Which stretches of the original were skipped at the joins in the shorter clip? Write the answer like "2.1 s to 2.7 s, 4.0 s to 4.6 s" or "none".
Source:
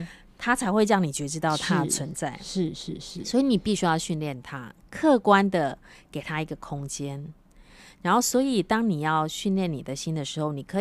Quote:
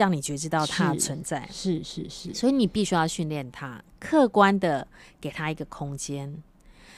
none

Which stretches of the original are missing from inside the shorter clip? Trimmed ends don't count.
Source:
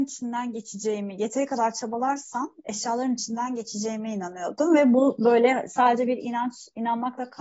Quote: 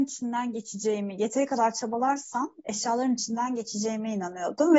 none

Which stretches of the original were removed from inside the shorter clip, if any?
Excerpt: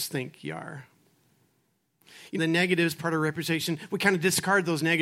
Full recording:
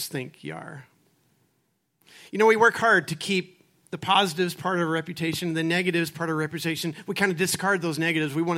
2.4 s to 5.5 s

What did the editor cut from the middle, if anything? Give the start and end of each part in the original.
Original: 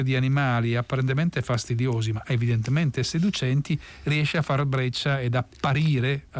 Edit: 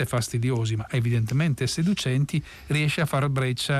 none

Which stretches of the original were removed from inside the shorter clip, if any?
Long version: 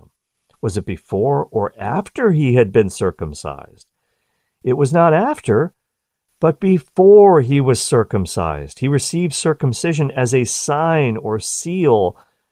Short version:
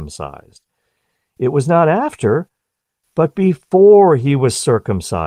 none

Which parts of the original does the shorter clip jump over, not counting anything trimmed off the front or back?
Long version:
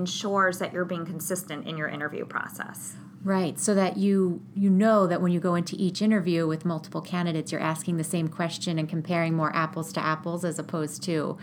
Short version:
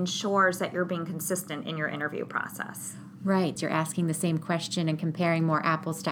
3.5 s to 7.4 s

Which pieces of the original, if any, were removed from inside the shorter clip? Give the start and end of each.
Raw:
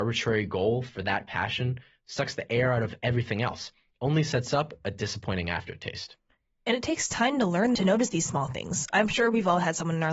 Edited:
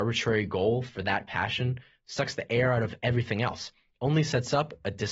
none

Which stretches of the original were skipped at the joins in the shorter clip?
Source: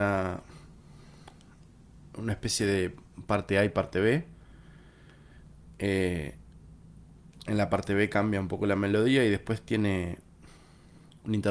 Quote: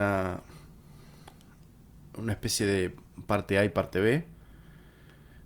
none

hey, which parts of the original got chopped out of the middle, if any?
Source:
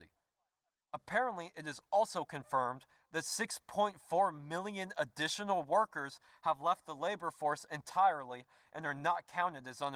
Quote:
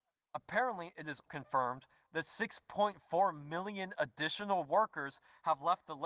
1.8 s to 2.2 s

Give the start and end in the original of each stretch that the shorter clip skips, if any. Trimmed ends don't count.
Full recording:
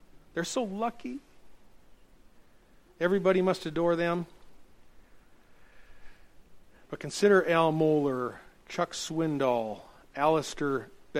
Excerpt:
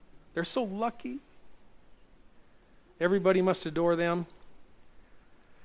none

